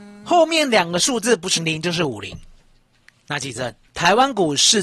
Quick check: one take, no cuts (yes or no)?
no